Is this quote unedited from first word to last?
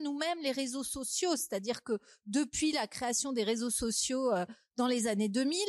yes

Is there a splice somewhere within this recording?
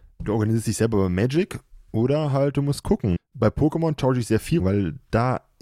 yes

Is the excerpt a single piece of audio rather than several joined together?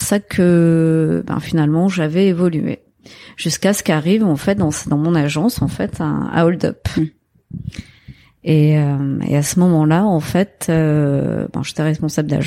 yes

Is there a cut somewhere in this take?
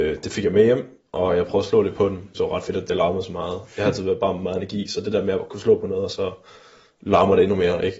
yes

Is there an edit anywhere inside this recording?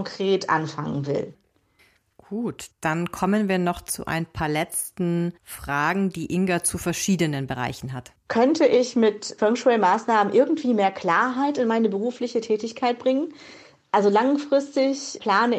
yes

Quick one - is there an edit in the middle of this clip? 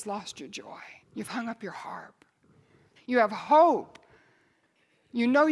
yes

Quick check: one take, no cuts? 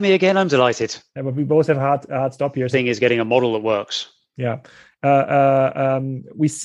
no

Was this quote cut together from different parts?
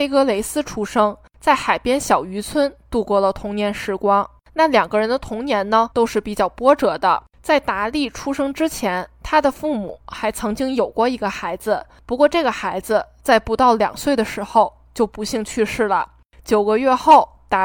no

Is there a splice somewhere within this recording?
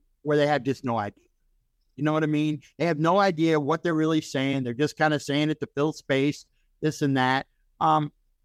no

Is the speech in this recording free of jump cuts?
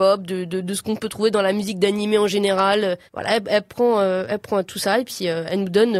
no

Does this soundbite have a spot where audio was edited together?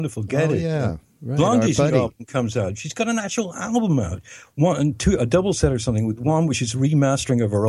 no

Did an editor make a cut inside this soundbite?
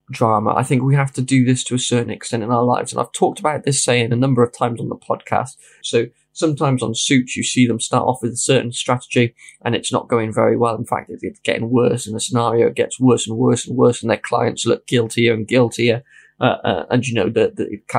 yes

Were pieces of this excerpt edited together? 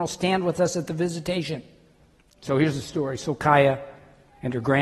no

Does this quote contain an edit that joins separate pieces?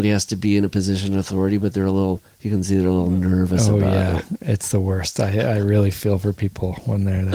no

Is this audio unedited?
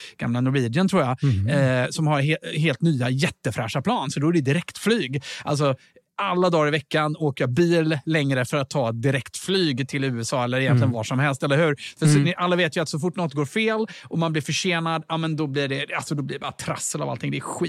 yes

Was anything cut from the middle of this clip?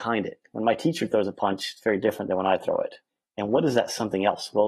no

